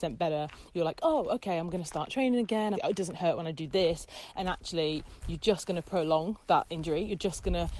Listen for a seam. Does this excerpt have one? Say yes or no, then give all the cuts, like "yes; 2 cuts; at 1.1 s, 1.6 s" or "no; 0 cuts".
yes; 1 cut; at 2.7 s